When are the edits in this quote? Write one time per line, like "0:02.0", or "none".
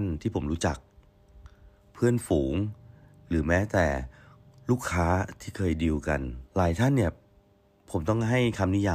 0:06.5